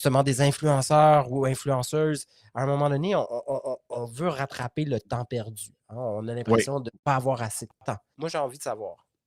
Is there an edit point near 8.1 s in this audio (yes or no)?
yes